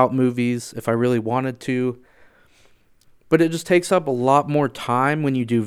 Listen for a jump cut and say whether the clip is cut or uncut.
uncut